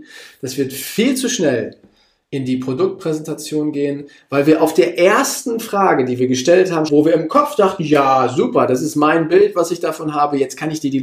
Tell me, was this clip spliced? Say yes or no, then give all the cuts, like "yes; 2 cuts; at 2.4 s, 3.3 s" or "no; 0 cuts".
yes; 1 cut; at 6.9 s